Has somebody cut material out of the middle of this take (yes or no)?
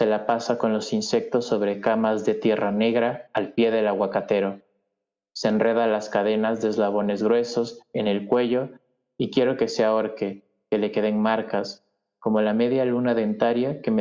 no